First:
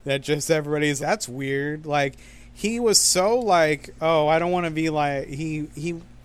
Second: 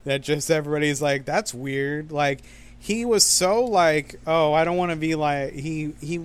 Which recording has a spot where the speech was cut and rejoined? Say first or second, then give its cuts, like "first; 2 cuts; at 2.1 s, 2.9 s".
first; 1 cut; at 1.0 s